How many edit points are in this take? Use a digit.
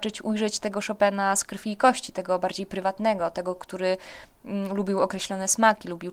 0